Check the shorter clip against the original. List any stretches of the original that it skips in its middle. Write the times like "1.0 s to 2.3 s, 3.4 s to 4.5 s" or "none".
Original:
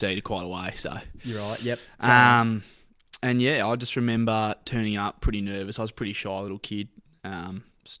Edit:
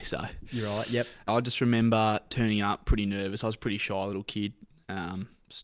2.0 s to 3.6 s

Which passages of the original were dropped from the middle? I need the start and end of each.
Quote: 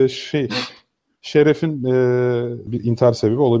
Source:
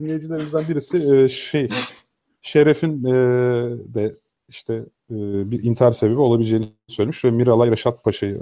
3.9 s to 5.5 s

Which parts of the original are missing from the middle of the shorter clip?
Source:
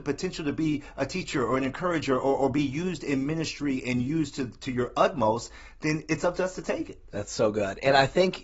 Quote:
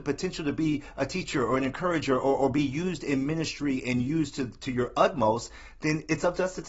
none

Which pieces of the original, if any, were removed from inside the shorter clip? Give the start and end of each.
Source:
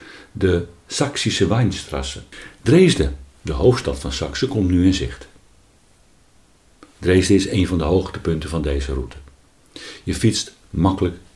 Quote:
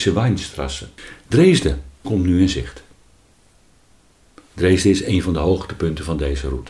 3.4 s to 4.5 s

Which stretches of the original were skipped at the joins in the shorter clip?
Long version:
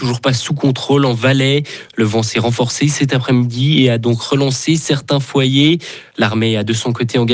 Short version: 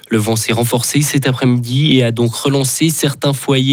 none

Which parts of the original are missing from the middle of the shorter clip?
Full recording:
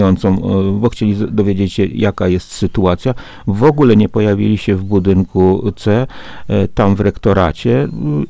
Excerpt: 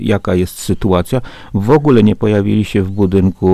none

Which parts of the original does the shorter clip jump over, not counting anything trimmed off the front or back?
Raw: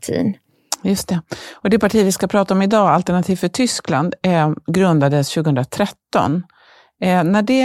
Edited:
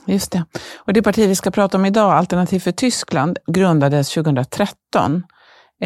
4.2 s to 4.6 s

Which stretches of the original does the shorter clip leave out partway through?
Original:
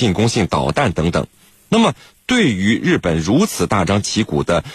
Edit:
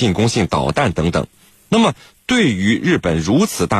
none

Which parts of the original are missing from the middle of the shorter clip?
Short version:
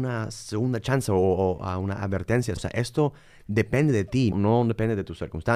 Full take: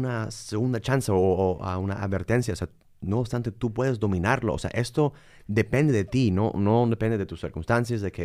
2.6 s to 4.6 s, 6.3 s to 6.5 s

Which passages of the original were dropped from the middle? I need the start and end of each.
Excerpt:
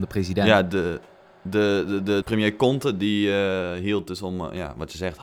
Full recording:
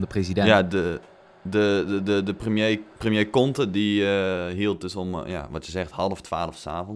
2.2 s to 3.0 s

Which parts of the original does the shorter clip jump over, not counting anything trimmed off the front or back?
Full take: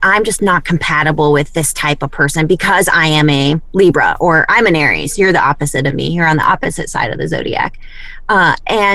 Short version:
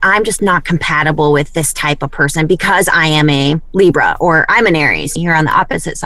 5.2 s to 6.1 s

